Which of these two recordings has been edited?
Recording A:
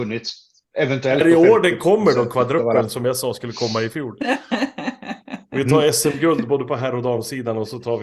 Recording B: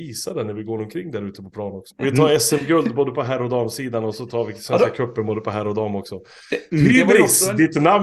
B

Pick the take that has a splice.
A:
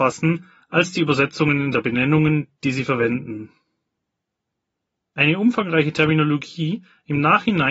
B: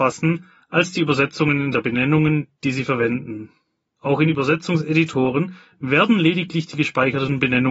B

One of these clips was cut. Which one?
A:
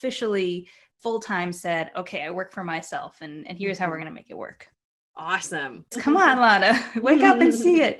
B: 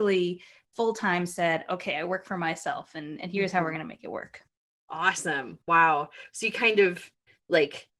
A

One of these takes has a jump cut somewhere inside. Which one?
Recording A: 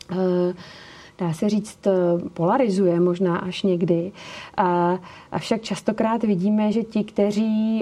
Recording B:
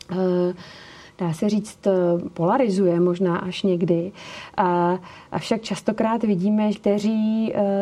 B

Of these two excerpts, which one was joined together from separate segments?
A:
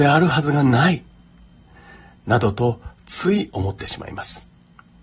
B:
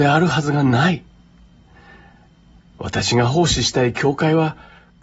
A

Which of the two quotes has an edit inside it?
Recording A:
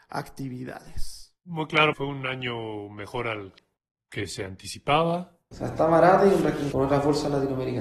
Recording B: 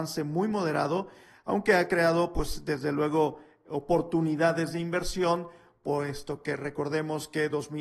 A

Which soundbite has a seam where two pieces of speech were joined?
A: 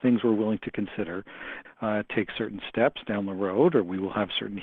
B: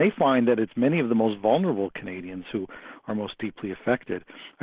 A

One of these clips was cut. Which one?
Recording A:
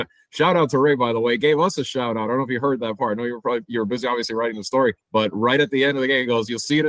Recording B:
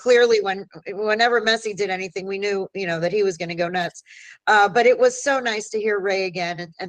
A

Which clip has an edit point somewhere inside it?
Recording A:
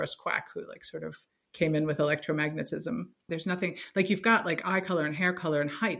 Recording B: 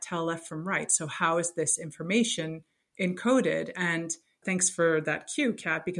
A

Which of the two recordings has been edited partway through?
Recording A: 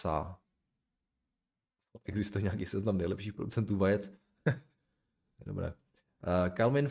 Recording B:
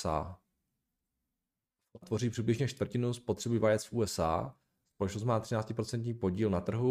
B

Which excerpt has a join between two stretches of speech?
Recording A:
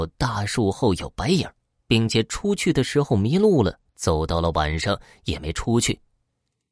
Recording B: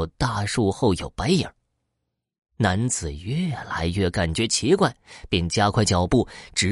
A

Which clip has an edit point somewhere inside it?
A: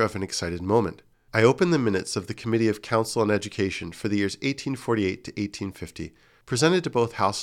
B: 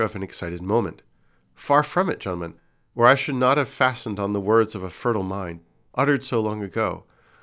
A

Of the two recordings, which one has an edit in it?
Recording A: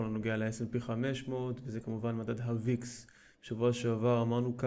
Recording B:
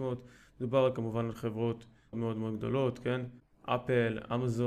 B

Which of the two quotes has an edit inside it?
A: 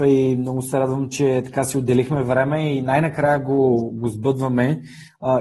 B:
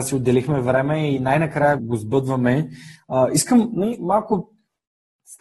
B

